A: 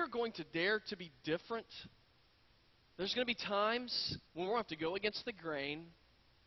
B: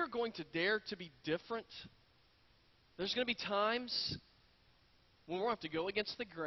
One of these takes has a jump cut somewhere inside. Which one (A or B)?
A